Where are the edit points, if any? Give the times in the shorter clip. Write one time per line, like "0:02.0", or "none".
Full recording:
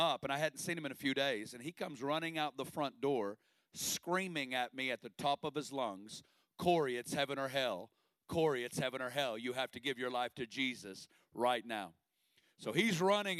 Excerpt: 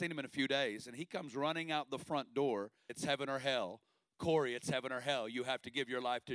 0:02.9